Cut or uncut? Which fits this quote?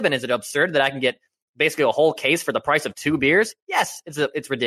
uncut